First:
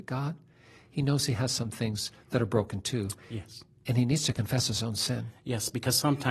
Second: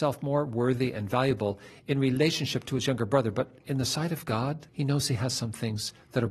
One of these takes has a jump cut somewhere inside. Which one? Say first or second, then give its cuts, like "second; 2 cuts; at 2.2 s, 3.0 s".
second; 1 cut; at 4.7 s